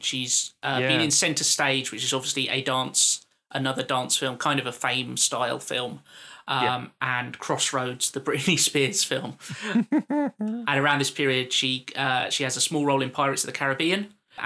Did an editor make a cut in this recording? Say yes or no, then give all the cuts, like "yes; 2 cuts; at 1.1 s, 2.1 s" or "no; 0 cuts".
no; 0 cuts